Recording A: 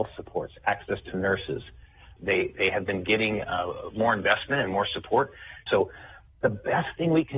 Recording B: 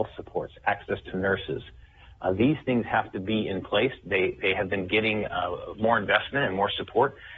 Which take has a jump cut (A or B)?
A